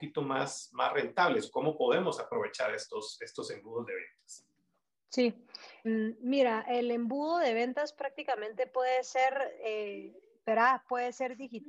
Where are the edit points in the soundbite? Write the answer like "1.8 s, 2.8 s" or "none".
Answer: 5.8 s